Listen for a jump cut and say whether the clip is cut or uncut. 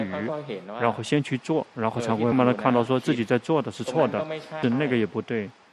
cut